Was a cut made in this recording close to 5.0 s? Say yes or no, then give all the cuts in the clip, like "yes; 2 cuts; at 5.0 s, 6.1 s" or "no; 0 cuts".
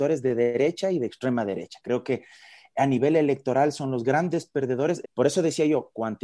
yes; 1 cut; at 5.0 s